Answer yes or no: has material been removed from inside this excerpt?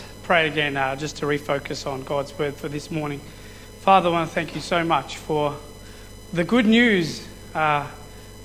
no